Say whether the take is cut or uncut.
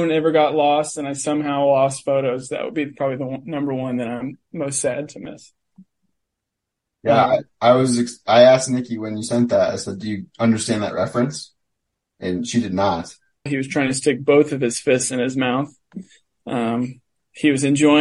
cut